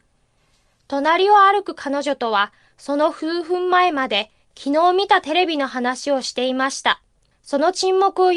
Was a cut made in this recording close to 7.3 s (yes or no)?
yes